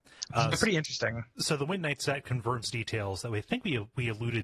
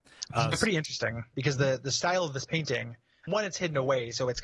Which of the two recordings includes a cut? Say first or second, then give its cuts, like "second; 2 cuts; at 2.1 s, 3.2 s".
second; 2 cuts; at 1.3 s, 3.3 s